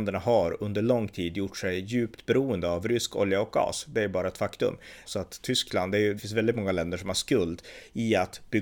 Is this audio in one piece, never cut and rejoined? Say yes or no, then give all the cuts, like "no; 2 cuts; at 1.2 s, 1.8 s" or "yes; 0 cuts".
no; 2 cuts; at 5.0 s, 6.2 s